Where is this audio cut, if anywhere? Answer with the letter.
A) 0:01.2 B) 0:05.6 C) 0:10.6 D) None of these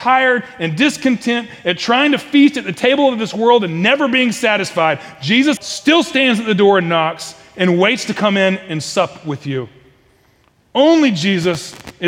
B